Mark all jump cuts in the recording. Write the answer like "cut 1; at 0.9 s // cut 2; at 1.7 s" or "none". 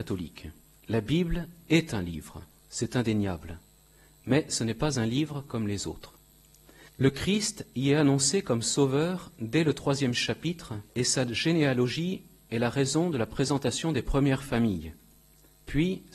cut 1; at 6.9 s // cut 2; at 10.9 s